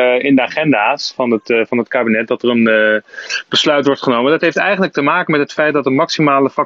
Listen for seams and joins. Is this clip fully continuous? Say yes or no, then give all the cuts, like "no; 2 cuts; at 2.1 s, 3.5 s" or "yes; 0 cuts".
yes; 0 cuts